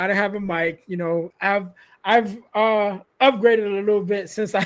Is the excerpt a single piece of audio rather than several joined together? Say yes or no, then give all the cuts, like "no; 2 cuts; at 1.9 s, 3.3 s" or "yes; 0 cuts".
no; 1 cut; at 1.3 s